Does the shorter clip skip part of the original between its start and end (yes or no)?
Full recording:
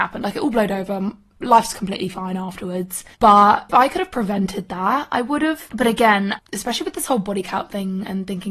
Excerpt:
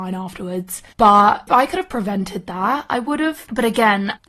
no